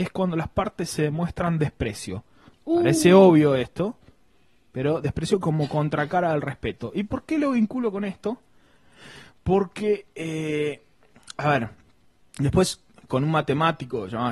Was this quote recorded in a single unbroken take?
yes; 0 cuts

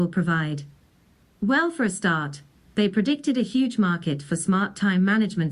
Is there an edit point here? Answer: yes; 2 cuts; at 1.3 s, 2.7 s

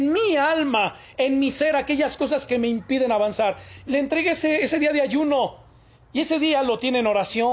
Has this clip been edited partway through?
yes; 1 cut; at 3.9 s

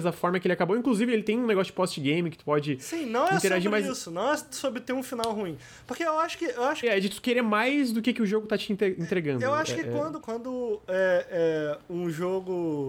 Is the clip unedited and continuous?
no; 2 cuts; at 6.8 s, 10.2 s

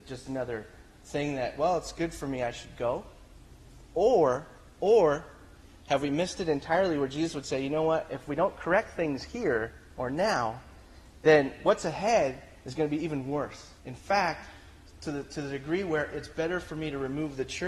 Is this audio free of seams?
no; 1 cut; at 13.8 s

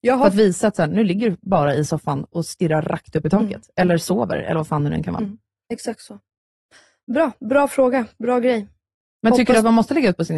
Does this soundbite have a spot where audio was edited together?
no; 0 cuts

